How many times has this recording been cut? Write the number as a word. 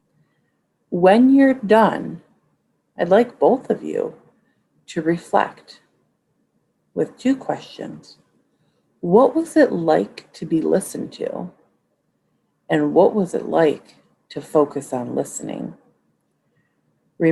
zero